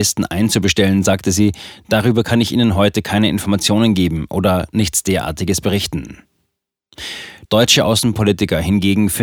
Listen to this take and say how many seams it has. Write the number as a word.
one